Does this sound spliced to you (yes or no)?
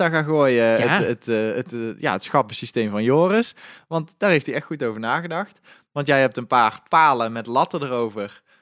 no